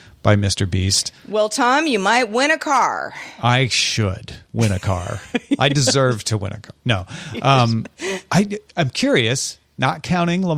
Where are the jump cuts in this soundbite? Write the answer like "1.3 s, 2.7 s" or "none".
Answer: none

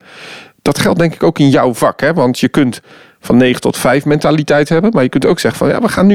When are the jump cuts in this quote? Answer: none

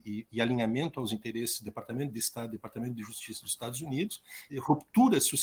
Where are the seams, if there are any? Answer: 4.5 s

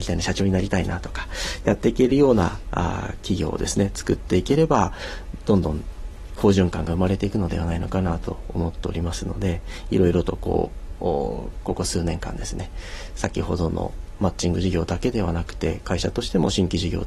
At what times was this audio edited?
none

